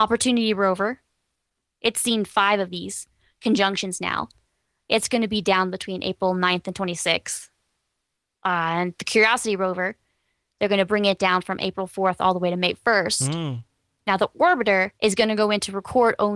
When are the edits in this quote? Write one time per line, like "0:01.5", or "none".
0:15.0